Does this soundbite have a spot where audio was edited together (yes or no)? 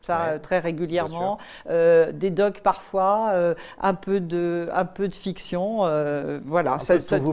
no